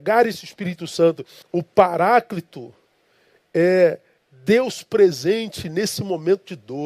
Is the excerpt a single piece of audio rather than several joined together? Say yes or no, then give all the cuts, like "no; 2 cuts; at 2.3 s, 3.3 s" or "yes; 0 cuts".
no; 1 cut; at 1.4 s